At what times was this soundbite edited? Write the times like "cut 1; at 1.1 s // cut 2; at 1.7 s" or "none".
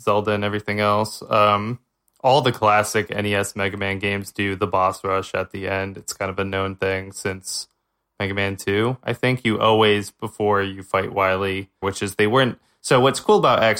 cut 1; at 11.8 s